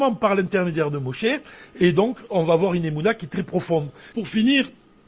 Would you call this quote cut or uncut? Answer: cut